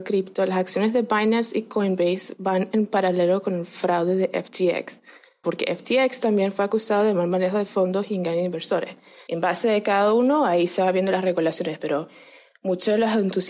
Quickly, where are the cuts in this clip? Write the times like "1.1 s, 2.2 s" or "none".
5.4 s, 9.3 s